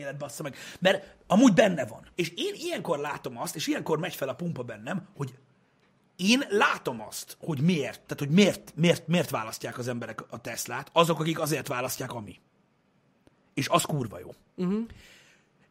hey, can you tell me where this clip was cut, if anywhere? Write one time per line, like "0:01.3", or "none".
0:02.1